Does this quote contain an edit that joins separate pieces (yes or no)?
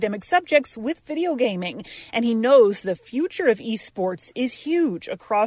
no